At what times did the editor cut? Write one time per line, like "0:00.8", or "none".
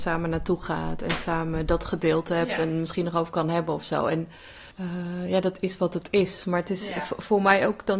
0:04.7